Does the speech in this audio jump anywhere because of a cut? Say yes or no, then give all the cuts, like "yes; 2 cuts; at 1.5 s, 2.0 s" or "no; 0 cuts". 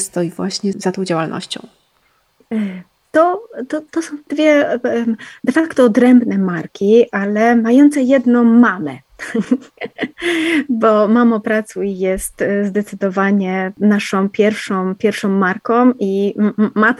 no; 0 cuts